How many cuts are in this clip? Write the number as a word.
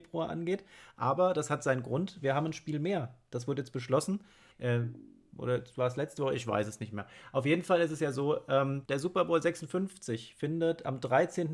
two